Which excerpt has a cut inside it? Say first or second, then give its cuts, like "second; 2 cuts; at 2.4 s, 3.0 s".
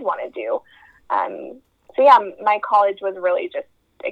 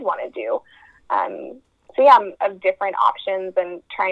second; 1 cut; at 2.3 s